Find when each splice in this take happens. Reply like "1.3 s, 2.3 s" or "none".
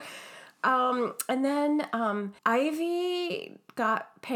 2.4 s